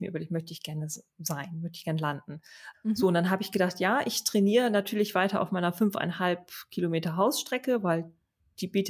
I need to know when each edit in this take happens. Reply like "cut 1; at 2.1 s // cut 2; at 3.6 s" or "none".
cut 1; at 2.7 s